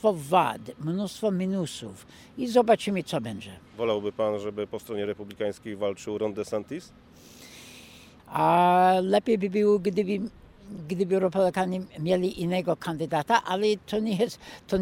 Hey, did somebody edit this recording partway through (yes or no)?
yes